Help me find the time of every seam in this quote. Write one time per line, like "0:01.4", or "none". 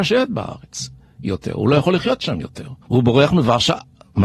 0:02.8